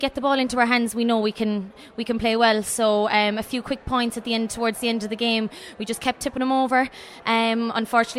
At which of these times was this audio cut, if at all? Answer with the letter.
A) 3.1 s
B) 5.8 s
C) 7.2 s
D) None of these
D